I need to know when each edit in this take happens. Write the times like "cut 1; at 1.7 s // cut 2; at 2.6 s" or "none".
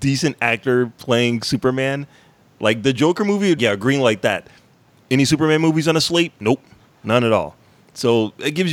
cut 1; at 3.6 s